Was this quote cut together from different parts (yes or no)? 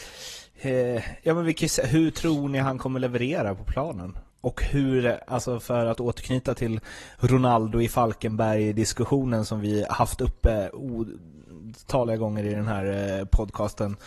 yes